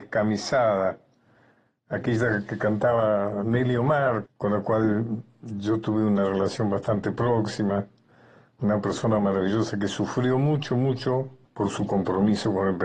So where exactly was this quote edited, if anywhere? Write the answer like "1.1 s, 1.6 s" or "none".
4.3 s, 11.4 s